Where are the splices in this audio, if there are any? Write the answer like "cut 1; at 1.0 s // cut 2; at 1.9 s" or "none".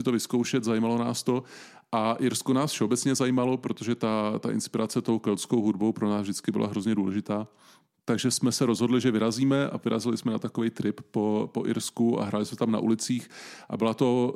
none